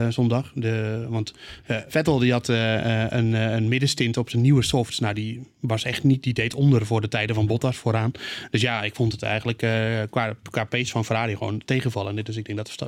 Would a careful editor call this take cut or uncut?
uncut